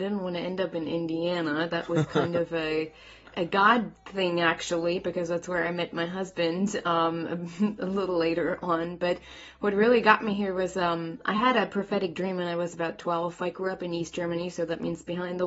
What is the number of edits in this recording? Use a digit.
0